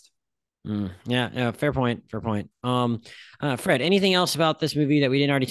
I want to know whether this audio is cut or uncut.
uncut